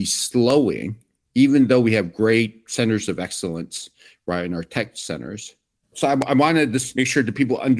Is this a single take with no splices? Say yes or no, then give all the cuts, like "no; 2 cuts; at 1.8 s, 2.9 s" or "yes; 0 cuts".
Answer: no; 1 cut; at 5.8 s